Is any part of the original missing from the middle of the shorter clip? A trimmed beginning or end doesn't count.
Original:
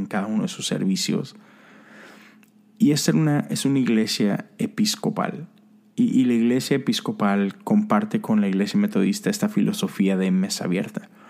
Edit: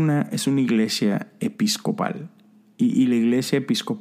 no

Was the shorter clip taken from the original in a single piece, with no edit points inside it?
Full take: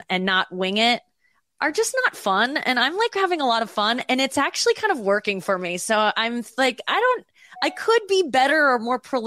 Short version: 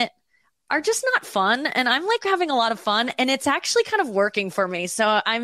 yes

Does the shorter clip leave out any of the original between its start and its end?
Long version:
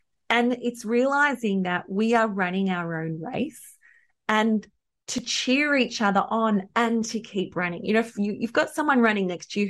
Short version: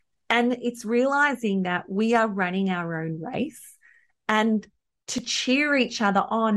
no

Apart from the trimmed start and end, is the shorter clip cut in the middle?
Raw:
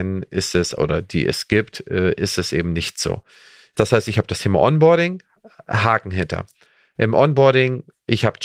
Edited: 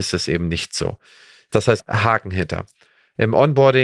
yes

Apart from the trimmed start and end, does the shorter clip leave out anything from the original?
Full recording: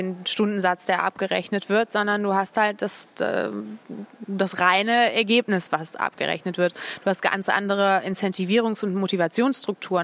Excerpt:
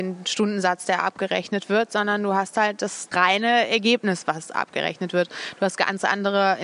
yes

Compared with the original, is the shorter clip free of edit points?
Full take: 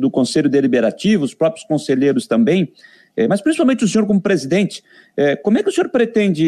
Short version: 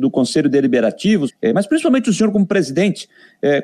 no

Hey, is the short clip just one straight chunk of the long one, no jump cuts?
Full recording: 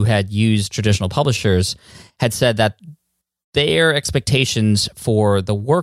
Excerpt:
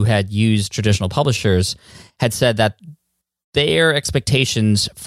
yes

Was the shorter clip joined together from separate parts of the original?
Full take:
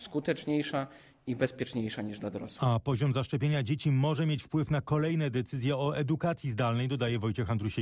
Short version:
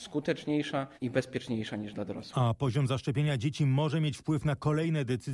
yes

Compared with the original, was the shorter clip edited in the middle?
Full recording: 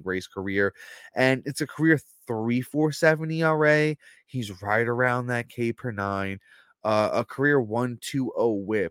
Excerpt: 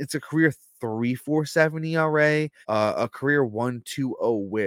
yes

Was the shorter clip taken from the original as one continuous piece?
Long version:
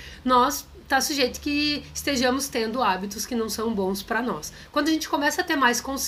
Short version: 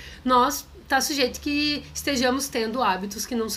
yes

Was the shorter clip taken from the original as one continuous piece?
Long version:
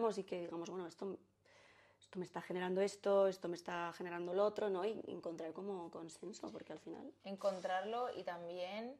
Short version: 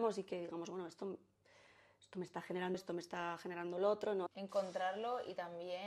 no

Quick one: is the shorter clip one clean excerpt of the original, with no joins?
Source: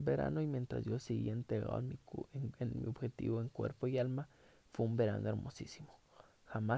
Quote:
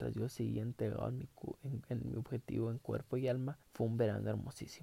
no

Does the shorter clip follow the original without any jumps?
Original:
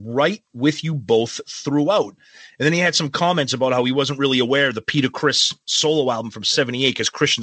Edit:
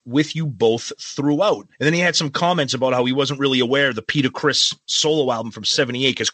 no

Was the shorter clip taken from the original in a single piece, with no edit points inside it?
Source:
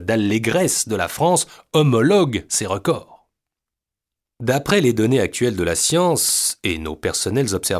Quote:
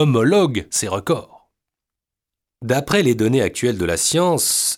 yes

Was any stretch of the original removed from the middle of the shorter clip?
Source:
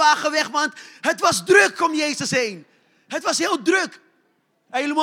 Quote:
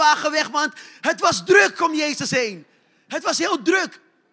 no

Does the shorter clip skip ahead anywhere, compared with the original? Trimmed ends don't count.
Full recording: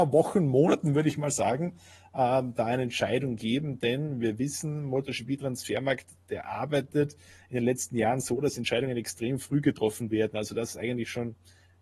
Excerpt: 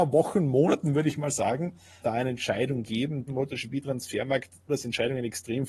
yes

